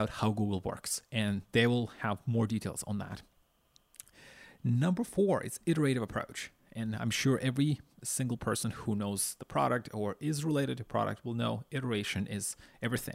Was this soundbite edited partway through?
no; 0 cuts

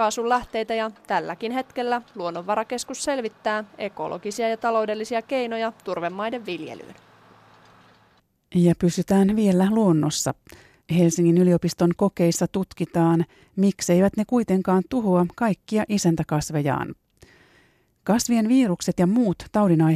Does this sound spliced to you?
yes; 1 cut; at 10.8 s

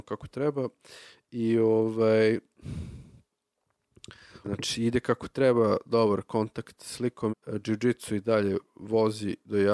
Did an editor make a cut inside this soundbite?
yes; 2 cuts; at 4.4 s, 7.3 s

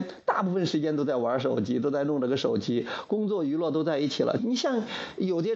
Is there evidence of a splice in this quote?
yes; 1 cut; at 4.4 s

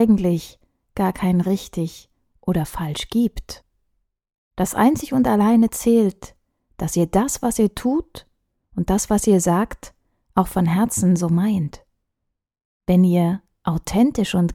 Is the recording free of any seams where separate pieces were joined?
yes; 0 cuts

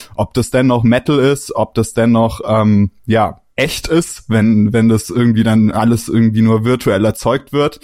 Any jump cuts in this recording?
yes; 1 cut; at 3.5 s

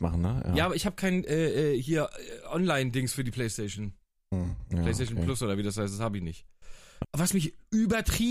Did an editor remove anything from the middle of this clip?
yes; 1 cut; at 7.0 s

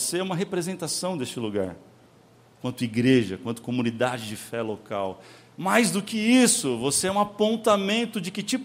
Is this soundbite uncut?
yes; 0 cuts

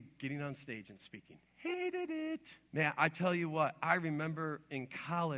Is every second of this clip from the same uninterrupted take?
no; 2 cuts; at 1.5 s, 2.7 s

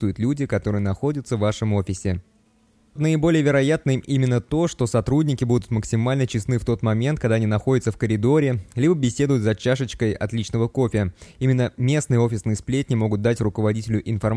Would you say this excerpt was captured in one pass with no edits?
no; 1 cut; at 3.0 s

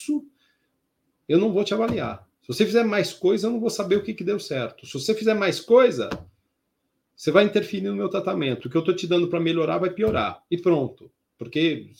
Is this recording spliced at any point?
yes; 1 cut; at 10.5 s

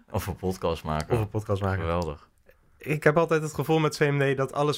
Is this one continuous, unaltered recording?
yes; 0 cuts

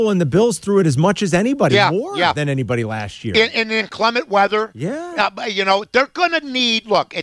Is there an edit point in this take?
no; 0 cuts

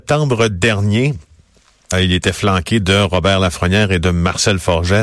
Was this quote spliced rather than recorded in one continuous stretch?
yes; 1 cut; at 1.9 s

